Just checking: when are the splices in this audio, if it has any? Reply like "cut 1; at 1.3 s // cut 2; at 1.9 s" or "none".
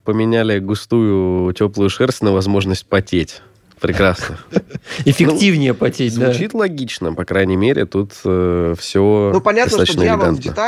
none